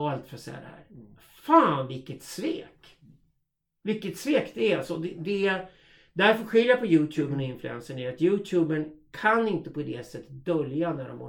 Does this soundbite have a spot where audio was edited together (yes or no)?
no